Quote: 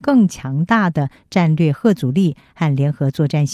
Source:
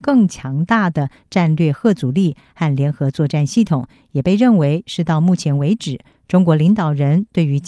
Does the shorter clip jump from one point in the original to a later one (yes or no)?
no